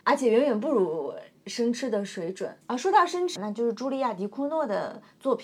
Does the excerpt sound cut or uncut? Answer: cut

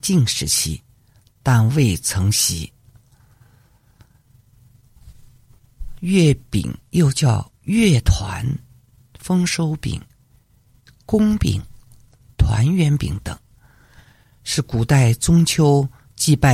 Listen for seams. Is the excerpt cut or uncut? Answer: uncut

